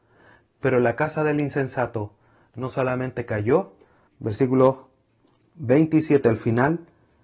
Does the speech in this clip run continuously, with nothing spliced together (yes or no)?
no